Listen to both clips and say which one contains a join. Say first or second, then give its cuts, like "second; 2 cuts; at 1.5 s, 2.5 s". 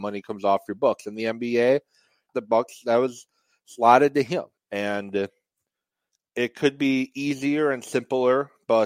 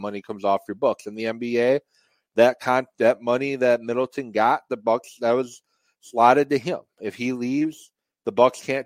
first; 2 cuts; at 2.3 s, 4.6 s